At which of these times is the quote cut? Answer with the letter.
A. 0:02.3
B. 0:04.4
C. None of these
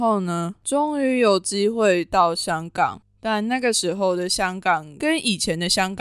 C